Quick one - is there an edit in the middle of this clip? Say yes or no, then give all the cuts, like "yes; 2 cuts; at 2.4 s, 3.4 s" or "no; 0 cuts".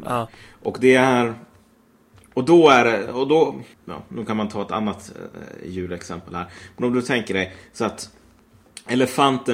yes; 1 cut; at 3.7 s